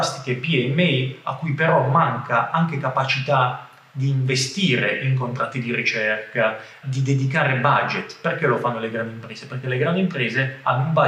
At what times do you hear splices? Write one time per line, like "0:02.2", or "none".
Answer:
0:06.8